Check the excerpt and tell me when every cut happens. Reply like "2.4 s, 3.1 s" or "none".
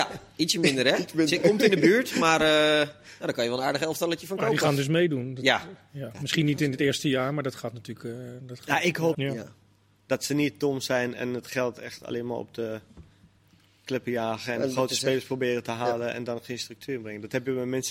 9.1 s